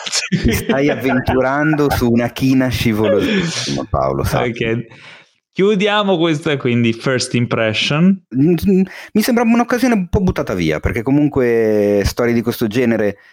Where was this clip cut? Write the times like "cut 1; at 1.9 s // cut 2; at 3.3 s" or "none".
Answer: cut 1; at 6.6 s // cut 2; at 8.3 s